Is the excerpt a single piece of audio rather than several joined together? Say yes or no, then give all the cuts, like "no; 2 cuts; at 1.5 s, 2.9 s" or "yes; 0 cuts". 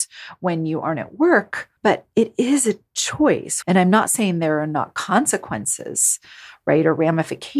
no; 2 cuts; at 1.8 s, 3.6 s